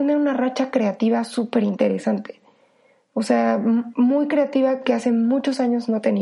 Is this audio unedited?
yes; 0 cuts

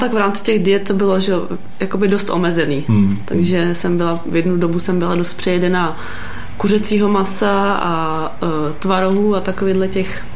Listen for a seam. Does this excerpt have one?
no; 0 cuts

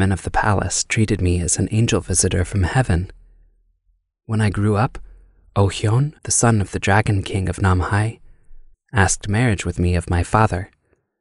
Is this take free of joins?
no; 2 cuts; at 6.2 s, 8.7 s

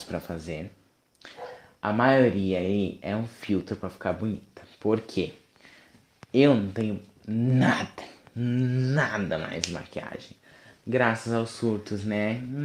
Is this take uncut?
yes; 0 cuts

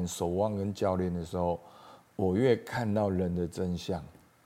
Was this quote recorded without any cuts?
yes; 0 cuts

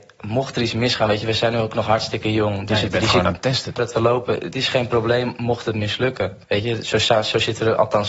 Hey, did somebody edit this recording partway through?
yes; 2 cuts; at 3.8 s, 6.4 s

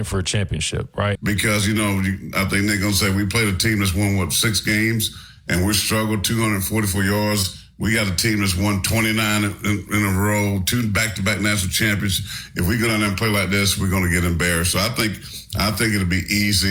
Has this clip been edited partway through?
yes; 1 cut; at 1.2 s

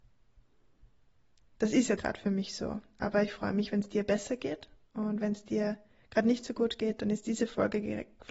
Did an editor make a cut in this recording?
yes; 1 cut; at 2.0 s

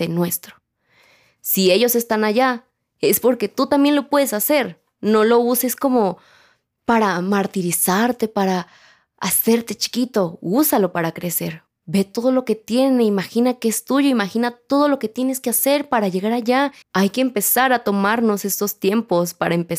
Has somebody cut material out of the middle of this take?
yes; 1 cut; at 16.8 s

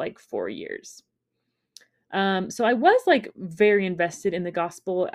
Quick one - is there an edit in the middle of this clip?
no; 0 cuts

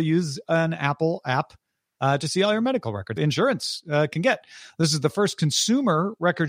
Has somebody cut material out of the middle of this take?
yes; 1 cut; at 3.2 s

